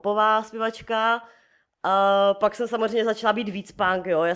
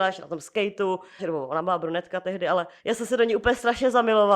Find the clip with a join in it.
second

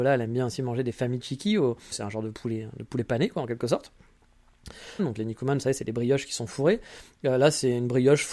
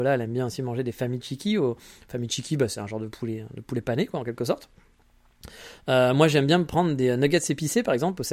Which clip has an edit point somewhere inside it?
first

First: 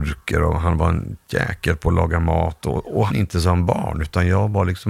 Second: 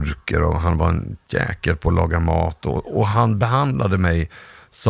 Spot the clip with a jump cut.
first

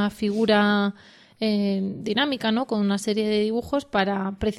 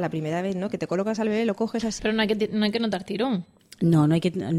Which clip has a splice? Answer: second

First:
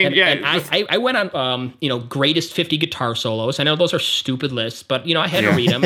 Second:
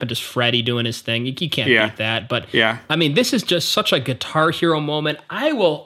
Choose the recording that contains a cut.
first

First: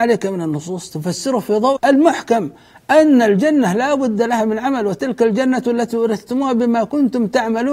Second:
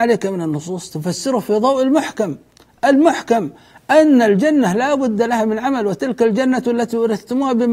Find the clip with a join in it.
first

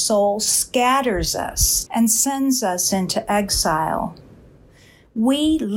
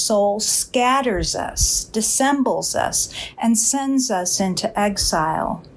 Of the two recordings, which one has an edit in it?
first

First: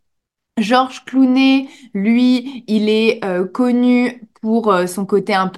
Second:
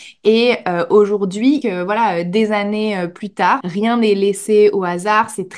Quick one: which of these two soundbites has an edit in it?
second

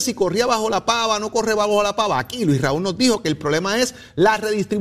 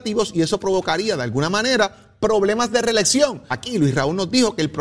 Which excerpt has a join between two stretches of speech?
second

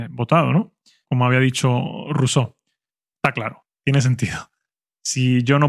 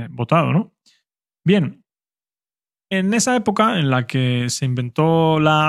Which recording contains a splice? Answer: first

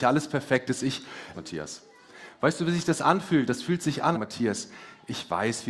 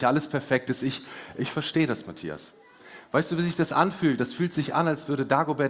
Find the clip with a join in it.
first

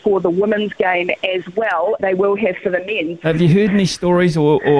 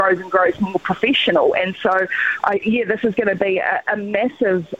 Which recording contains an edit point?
first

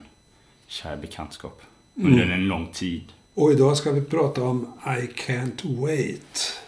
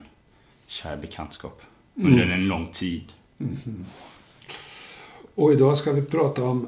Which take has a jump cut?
first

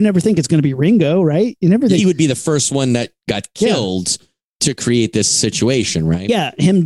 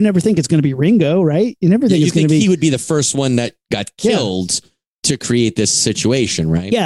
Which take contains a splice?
first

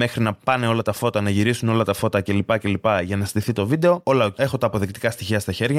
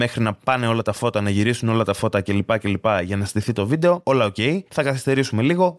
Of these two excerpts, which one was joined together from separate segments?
first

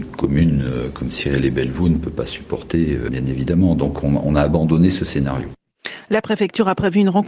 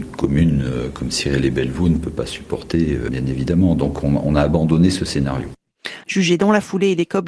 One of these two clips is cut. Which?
second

